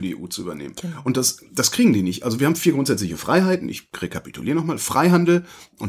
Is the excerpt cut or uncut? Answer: uncut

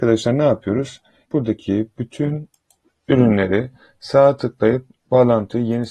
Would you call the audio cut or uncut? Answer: cut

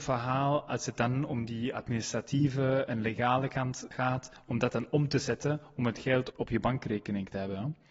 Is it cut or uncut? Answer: cut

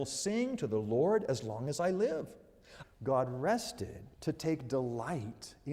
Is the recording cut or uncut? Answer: cut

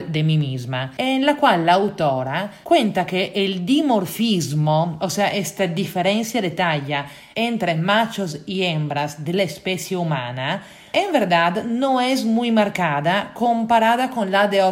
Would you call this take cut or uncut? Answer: uncut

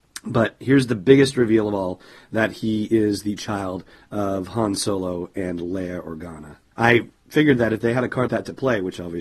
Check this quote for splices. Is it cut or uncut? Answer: cut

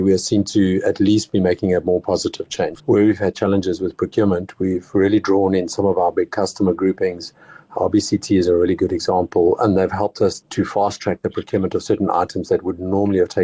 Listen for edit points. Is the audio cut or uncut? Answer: cut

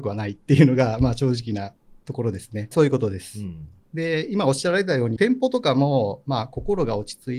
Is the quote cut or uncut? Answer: cut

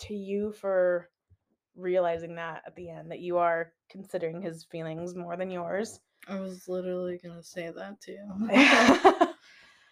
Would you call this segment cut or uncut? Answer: uncut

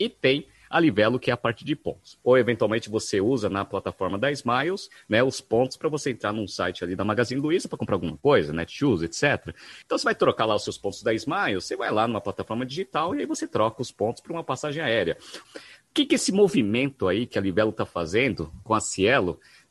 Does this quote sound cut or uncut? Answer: cut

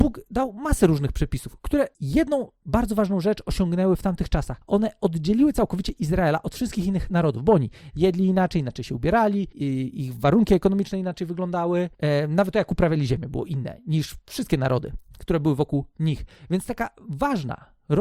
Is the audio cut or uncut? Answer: uncut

